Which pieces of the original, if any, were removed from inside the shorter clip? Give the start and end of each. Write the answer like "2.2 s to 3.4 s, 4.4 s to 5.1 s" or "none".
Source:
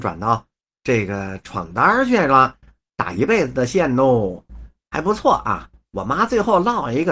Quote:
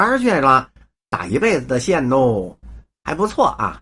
none